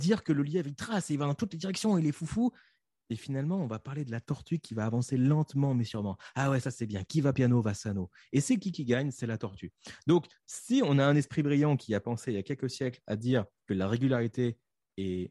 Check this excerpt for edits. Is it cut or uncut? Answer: uncut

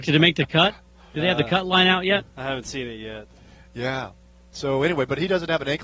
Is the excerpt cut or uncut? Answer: uncut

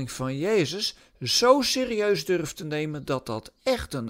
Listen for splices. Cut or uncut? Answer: uncut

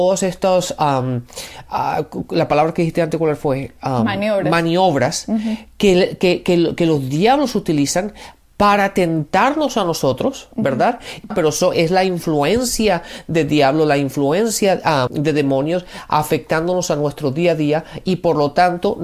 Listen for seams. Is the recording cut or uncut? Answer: cut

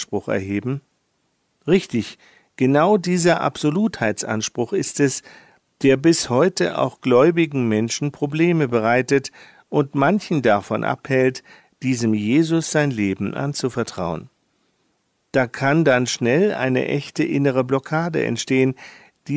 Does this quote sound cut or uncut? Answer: uncut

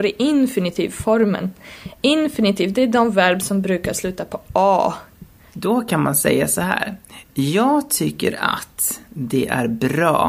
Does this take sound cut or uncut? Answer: cut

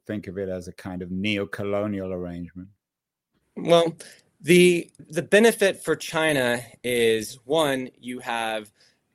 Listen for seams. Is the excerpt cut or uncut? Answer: cut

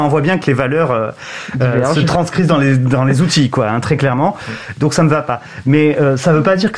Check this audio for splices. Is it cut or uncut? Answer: uncut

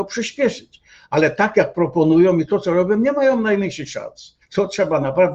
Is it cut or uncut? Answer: cut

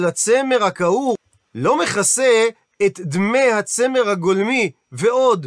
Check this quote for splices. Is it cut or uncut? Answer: uncut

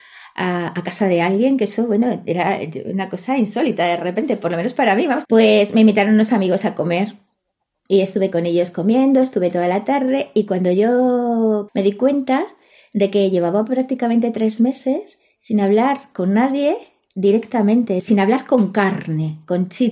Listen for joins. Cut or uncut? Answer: cut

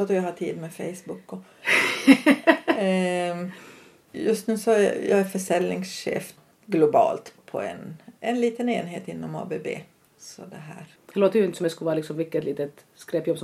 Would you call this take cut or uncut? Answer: uncut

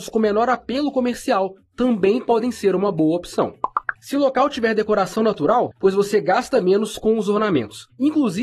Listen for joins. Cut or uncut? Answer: cut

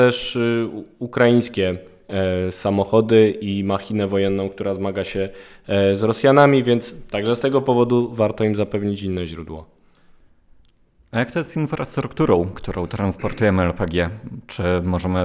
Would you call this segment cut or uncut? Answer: uncut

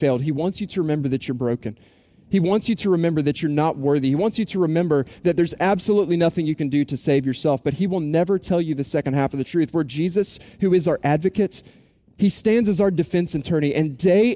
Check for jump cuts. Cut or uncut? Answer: uncut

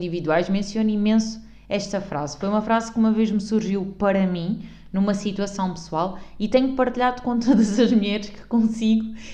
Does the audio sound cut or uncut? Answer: uncut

